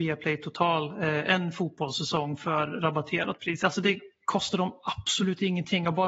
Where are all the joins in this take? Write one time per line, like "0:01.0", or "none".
0:03.6